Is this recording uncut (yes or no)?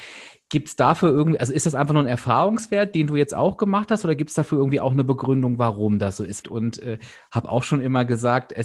no